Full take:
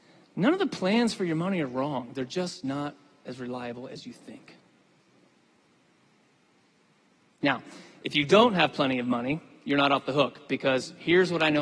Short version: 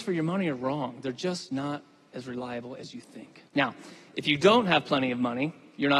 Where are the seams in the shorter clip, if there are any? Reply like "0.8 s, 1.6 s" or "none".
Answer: 3.5 s